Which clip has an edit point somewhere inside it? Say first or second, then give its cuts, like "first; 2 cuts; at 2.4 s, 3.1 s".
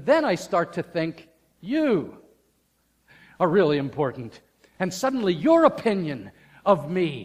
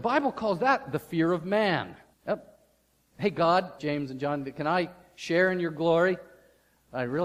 second; 2 cuts; at 2.1 s, 3.8 s